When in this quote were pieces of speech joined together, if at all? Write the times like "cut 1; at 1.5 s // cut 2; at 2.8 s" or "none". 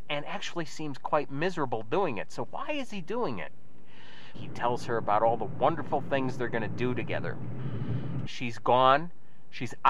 cut 1; at 4.3 s // cut 2; at 8.3 s